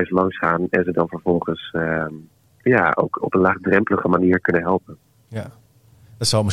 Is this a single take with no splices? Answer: no; 1 cut; at 3.2 s

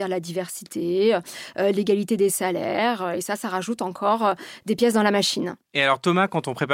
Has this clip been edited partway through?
yes; 1 cut; at 5.6 s

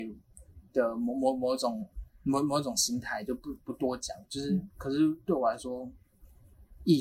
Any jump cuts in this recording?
no; 0 cuts

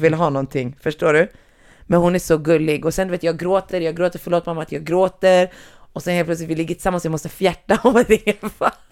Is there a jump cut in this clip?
no; 0 cuts

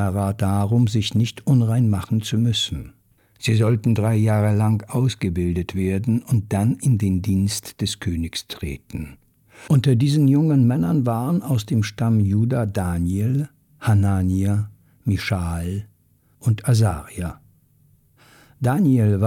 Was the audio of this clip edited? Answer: yes; 1 cut; at 3.2 s

